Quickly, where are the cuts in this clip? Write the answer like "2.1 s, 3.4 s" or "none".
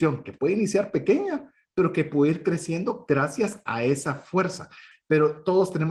4.9 s